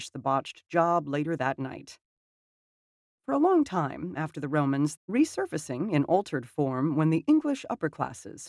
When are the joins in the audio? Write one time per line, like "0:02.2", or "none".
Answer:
0:05.0